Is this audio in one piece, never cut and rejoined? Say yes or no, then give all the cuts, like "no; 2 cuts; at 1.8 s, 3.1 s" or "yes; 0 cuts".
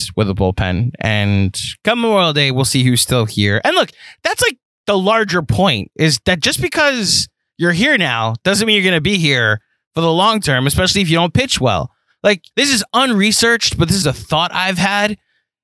no; 2 cuts; at 12.5 s, 14.0 s